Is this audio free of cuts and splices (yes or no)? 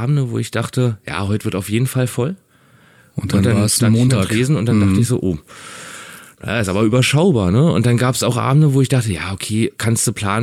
yes